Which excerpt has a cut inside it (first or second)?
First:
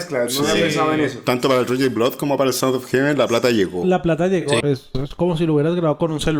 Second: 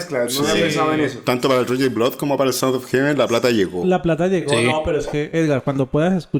first